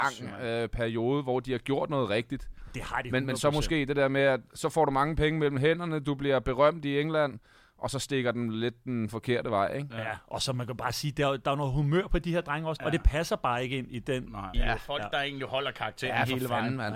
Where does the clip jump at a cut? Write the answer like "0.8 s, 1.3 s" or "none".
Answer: 12.8 s, 14.5 s